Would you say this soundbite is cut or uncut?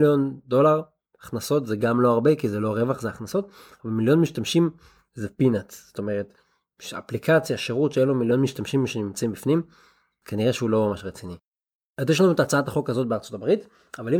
uncut